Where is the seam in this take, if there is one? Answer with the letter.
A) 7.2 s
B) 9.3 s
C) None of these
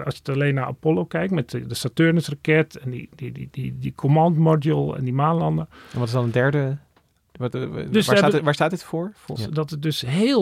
B